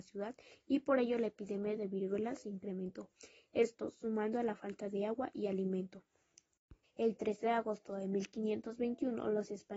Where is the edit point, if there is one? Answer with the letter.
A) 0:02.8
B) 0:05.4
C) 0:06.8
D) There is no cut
C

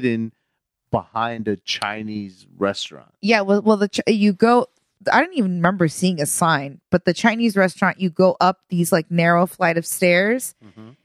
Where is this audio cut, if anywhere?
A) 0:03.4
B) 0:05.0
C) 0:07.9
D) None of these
D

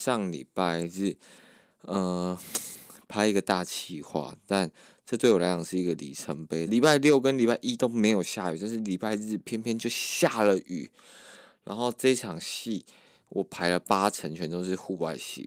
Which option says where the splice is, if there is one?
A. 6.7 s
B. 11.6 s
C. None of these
A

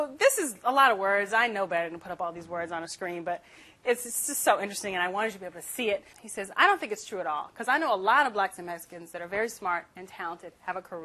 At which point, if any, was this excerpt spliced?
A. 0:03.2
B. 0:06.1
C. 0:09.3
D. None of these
B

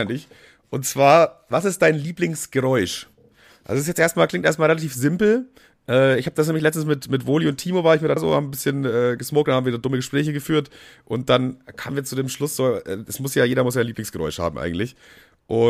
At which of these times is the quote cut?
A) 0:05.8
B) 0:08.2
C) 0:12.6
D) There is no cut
B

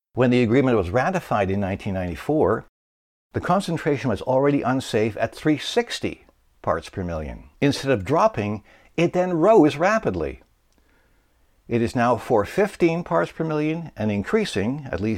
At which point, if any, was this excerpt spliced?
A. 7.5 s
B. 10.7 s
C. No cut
A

